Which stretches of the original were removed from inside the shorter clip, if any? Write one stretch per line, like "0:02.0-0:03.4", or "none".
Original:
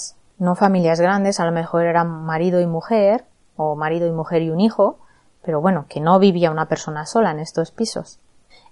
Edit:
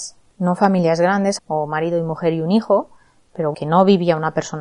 0:01.4-0:03.5
0:05.6-0:05.9